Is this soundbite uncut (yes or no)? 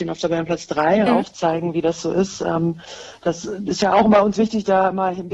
no